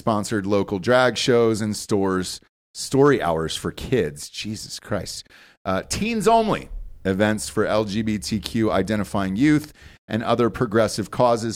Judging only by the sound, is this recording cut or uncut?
uncut